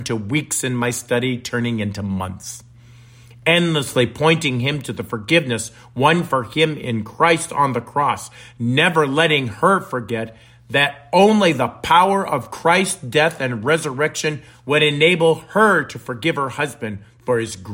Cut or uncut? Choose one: uncut